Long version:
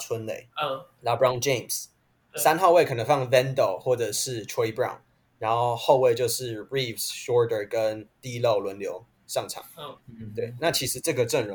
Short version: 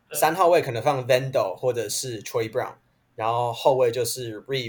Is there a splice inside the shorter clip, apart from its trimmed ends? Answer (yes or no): no